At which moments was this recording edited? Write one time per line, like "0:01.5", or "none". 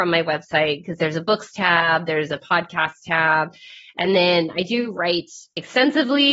none